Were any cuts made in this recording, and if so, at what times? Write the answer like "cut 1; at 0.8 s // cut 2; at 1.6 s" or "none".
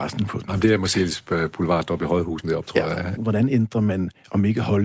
cut 1; at 3.2 s